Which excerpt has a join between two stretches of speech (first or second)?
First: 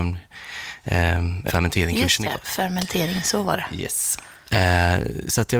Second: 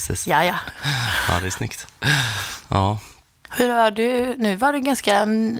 first